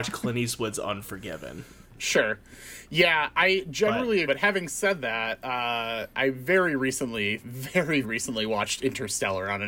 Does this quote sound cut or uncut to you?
cut